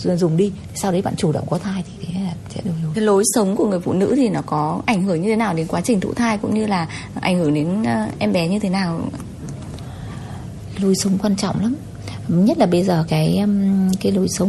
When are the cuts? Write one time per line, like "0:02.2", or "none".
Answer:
0:02.9
0:13.1